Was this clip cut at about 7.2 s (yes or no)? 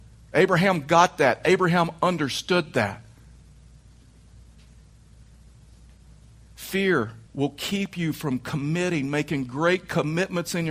yes